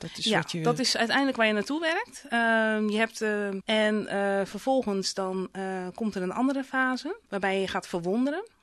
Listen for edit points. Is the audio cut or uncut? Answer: cut